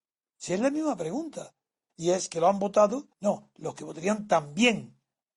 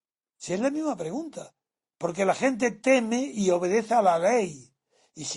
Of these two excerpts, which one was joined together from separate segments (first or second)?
first